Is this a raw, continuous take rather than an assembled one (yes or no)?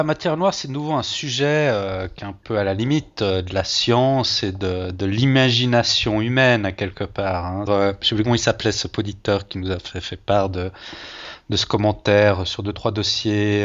no